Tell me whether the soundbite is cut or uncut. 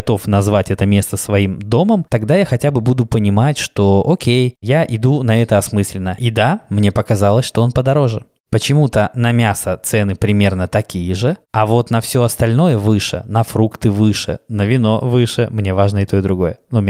cut